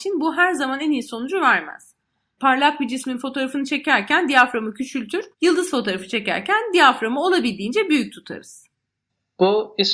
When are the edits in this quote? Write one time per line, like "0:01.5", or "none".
0:02.4
0:05.3